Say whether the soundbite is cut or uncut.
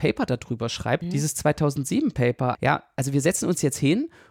cut